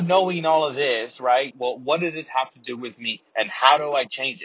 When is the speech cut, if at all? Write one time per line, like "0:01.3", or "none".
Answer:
0:01.5